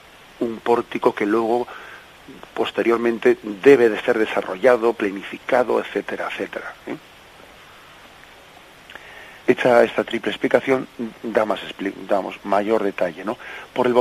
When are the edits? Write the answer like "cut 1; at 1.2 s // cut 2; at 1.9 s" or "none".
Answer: cut 1; at 9.4 s // cut 2; at 12.4 s